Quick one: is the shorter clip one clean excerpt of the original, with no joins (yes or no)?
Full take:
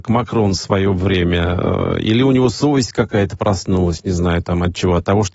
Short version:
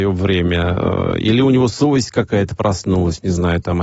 yes